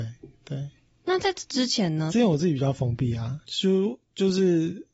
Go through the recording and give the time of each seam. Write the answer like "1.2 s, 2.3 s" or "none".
2.1 s, 3.4 s